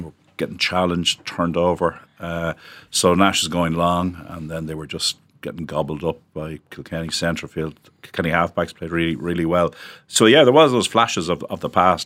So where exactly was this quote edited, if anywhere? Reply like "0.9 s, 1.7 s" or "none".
none